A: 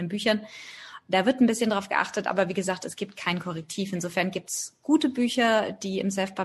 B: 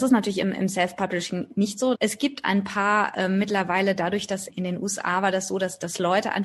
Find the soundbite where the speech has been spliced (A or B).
B